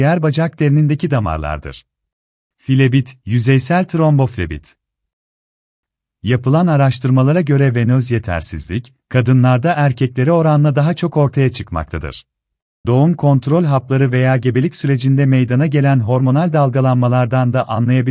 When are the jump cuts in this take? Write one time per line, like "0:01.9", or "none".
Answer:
0:02.4
0:12.8